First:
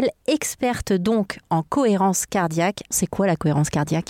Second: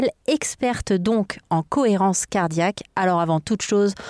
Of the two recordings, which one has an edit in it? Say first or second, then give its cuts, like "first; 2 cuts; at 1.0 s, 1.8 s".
first; 1 cut; at 2.9 s